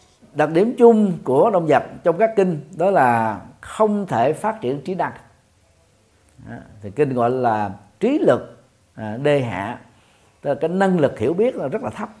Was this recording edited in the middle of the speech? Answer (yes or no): no